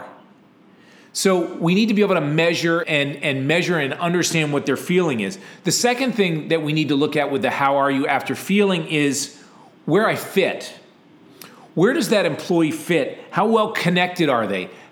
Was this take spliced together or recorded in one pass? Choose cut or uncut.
cut